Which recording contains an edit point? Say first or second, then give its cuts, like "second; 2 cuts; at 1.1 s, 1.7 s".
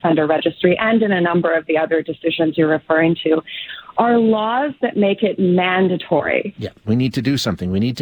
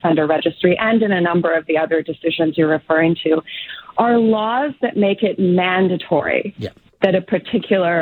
first; 1 cut; at 6.8 s